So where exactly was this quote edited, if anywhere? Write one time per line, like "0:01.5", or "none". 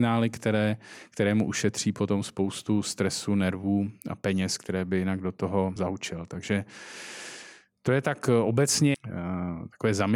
0:05.8
0:08.9